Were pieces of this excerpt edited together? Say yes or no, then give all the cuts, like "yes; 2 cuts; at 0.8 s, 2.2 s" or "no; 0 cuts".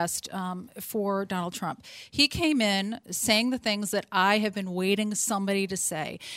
no; 0 cuts